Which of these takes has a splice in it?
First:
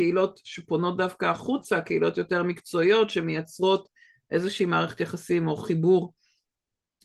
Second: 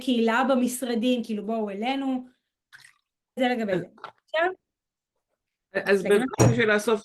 second; 1 cut; at 3.4 s

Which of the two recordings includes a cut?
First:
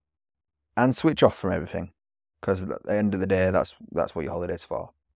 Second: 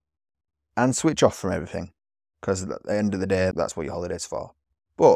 second; 1 cut; at 3.5 s

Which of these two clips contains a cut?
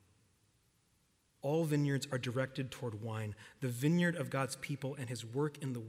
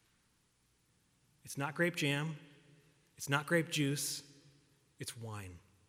first; 1 cut; at 1.3 s

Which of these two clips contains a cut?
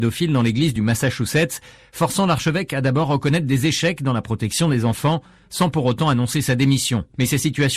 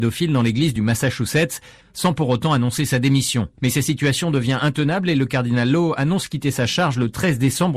second; 1 cut; at 1.8 s

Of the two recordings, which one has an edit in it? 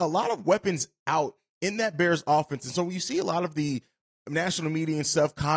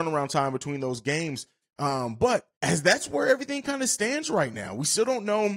second; 1 cut; at 1.6 s

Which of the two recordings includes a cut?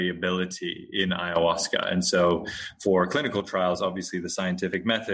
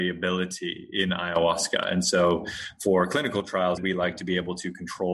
second; 1 cut; at 3.8 s

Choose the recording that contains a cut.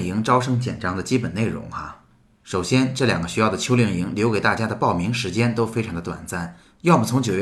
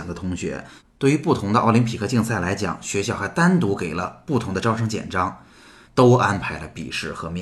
second; 1 cut; at 5.8 s

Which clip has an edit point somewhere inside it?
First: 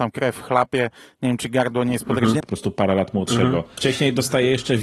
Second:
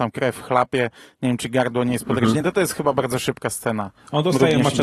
first; 2 cuts; at 2.4 s, 3.8 s

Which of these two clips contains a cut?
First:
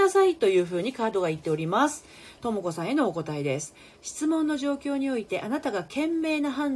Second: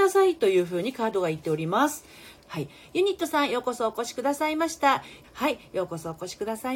second; 2 cuts; at 2.4 s, 5.2 s

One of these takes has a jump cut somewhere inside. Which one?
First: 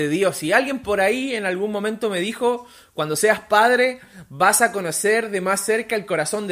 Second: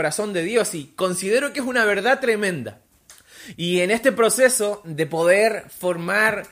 second; 1 cut; at 3.5 s

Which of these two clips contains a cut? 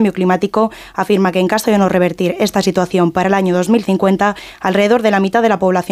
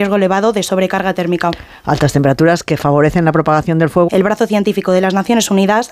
second; 1 cut; at 4.1 s

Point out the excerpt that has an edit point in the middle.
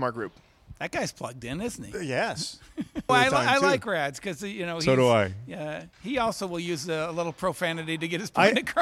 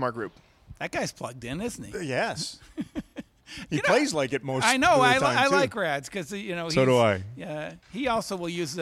first; 1 cut; at 3.1 s

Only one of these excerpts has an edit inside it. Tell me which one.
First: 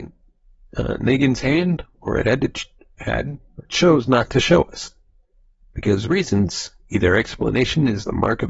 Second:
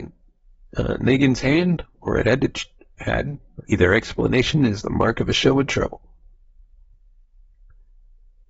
second; 1 cut; at 3.7 s

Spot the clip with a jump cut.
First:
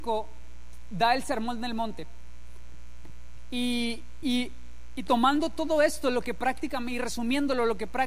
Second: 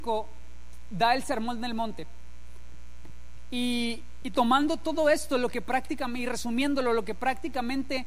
second; 1 cut; at 4.2 s

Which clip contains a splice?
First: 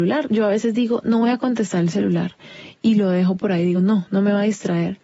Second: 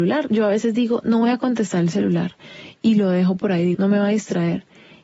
second; 1 cut; at 3.7 s

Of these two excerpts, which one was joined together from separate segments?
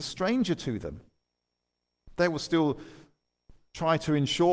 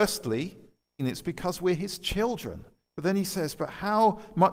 second; 2 cuts; at 1.0 s, 2.9 s

